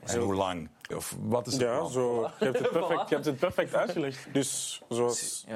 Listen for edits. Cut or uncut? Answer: cut